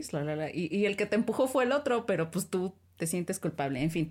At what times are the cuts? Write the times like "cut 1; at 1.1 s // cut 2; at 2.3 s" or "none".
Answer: cut 1; at 2.8 s